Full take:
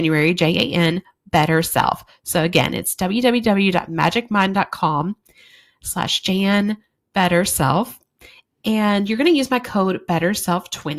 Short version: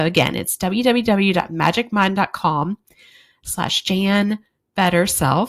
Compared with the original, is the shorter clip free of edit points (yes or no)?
yes